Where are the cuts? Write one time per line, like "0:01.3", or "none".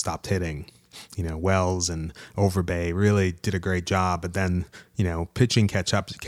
none